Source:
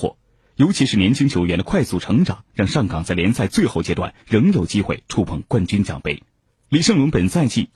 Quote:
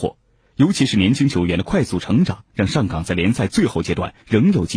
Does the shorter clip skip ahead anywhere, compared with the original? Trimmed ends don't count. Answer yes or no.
no